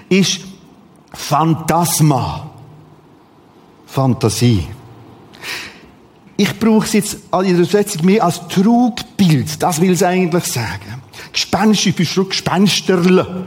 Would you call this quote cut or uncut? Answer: uncut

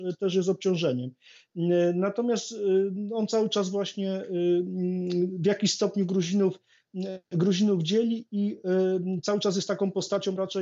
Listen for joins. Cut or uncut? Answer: uncut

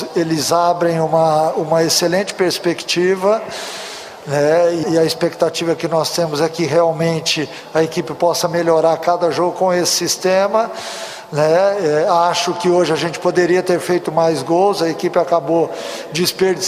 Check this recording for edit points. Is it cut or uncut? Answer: cut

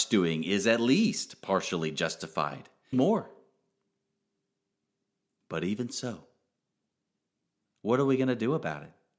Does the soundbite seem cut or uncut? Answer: cut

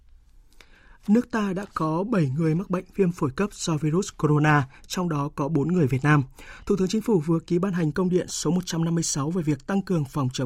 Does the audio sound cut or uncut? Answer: uncut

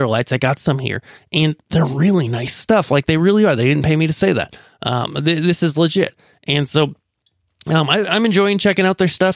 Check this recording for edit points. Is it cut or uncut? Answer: uncut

